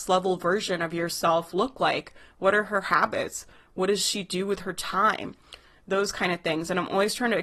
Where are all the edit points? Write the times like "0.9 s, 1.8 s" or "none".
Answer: none